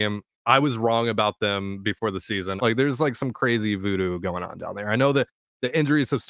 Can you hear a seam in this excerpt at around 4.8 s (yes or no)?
no